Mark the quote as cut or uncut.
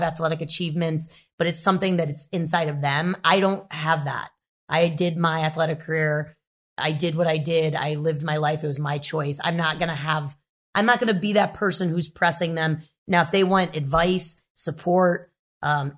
uncut